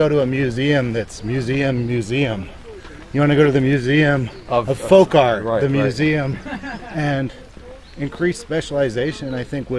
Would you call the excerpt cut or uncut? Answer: uncut